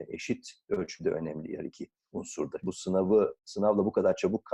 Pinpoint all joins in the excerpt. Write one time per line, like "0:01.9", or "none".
0:02.6